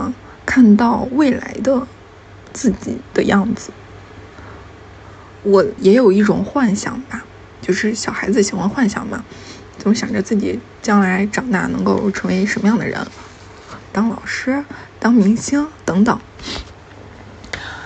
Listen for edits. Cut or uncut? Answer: cut